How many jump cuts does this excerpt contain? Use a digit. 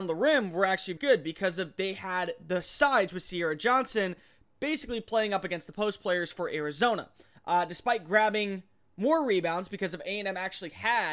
1